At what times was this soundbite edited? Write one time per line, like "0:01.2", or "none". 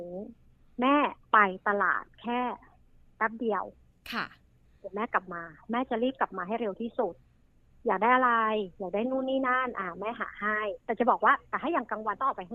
0:10.8